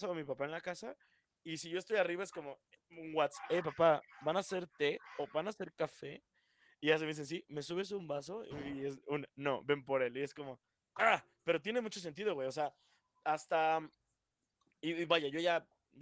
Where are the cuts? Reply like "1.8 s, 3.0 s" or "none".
none